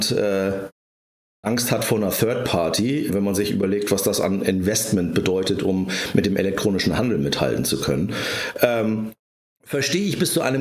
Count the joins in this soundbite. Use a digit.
1